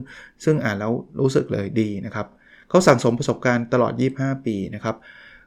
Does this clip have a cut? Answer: no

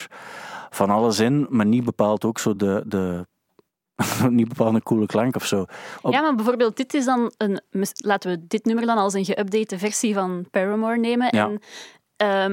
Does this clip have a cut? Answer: no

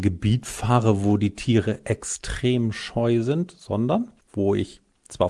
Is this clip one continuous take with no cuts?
no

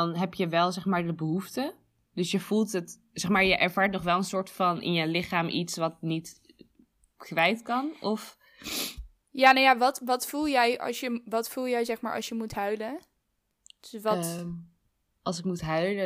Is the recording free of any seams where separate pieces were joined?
yes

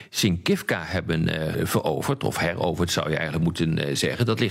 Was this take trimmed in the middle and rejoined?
yes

